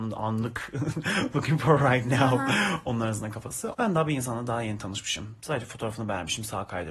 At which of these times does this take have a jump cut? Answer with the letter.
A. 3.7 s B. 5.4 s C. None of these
A